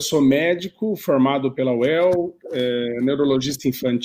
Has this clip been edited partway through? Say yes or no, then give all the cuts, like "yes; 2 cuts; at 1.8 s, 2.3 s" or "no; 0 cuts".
no; 0 cuts